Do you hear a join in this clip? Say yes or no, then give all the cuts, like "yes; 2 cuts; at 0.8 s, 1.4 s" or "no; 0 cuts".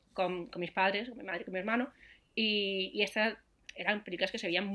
no; 0 cuts